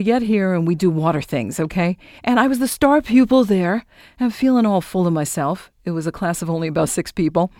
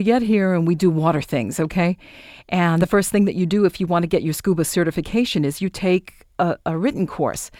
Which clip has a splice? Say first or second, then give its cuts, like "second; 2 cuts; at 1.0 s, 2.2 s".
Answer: first; 1 cut; at 2.2 s